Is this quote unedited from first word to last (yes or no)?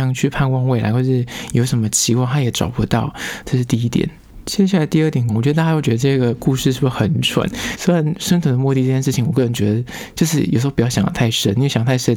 no